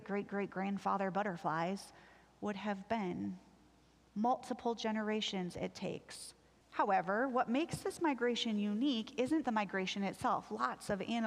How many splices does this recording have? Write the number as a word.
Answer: two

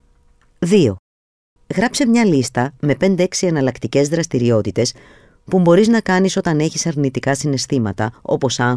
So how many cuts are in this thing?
one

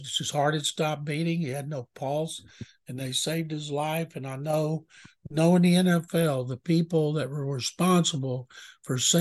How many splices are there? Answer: zero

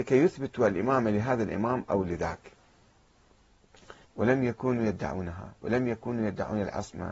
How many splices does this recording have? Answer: one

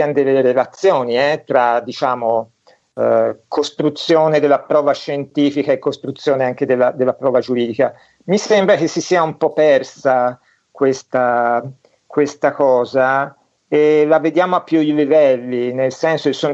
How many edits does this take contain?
zero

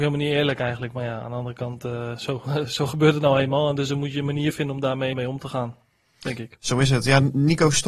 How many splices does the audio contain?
one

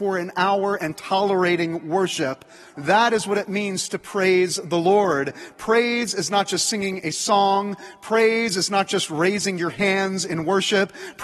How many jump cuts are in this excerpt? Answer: one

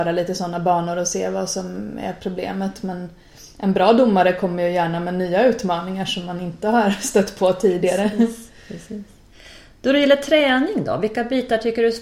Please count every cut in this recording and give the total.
zero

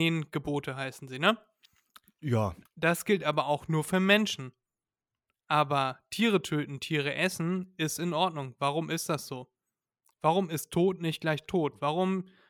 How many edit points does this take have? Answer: one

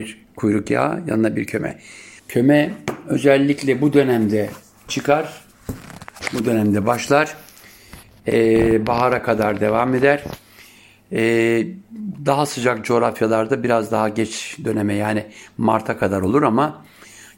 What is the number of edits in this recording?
one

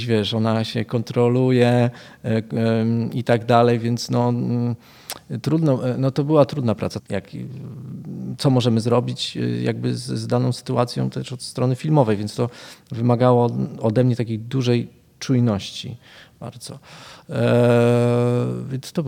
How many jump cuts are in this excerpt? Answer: one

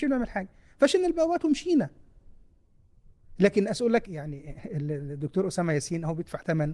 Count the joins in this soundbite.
one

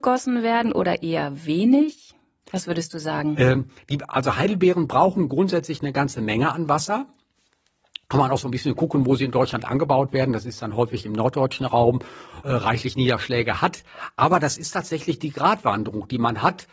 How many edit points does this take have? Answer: one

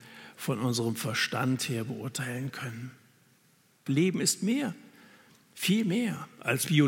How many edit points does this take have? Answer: one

